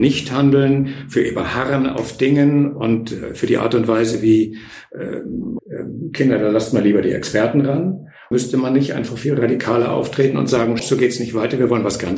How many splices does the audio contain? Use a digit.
3